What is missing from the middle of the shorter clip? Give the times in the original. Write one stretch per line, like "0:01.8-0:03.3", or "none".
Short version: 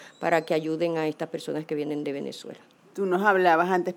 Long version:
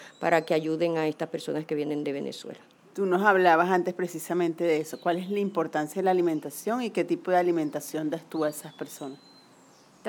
none